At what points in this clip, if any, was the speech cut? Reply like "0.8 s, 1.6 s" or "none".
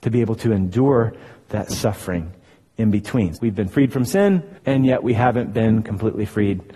3.4 s, 4.6 s